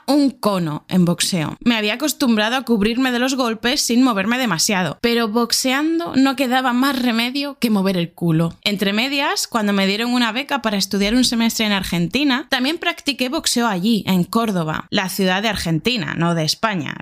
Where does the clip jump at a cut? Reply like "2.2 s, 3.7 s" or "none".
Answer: none

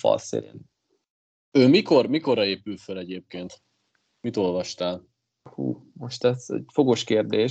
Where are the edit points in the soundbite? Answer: none

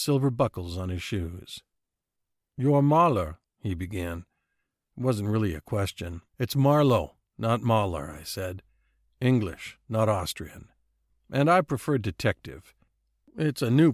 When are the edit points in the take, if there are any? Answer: 3.4 s, 6.3 s, 11.1 s

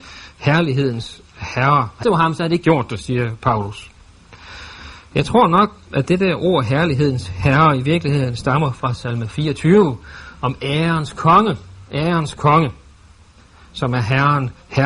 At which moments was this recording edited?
2.0 s

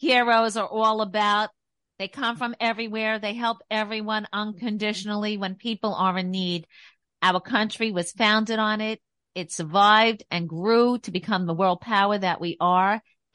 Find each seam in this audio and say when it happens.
none

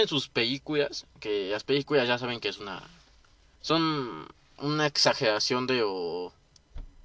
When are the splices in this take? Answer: none

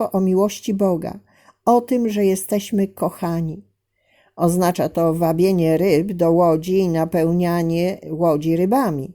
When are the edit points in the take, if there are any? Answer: none

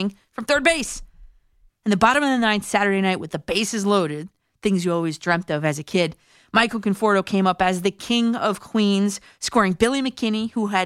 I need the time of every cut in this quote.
1.7 s

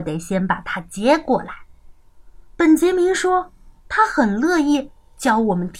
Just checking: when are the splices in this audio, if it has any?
2.5 s, 3.8 s

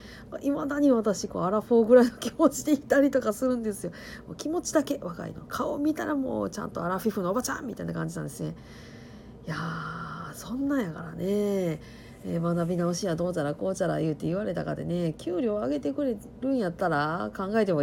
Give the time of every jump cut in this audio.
none

